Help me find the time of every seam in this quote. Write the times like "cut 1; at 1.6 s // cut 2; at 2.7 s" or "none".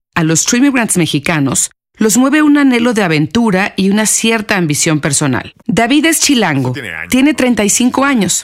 cut 1; at 5.6 s